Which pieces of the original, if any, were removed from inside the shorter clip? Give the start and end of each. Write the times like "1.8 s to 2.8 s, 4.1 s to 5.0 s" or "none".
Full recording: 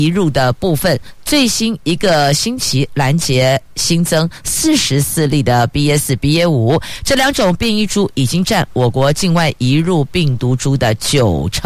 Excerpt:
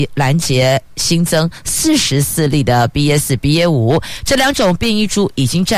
none